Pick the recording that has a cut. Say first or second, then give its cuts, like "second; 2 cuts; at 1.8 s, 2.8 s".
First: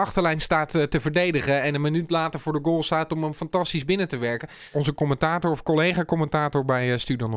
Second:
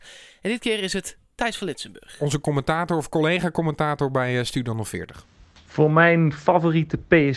first; 1 cut; at 4.7 s